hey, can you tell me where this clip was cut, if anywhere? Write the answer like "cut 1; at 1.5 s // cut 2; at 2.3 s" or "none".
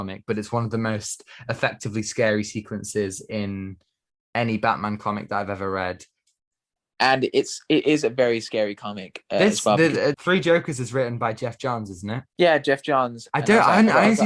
cut 1; at 10.1 s // cut 2; at 12.3 s